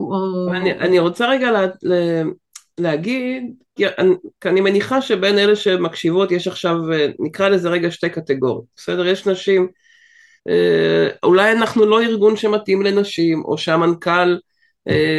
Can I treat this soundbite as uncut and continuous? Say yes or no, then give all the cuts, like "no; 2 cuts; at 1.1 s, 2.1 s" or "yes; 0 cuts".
no; 2 cuts; at 3.8 s, 10.4 s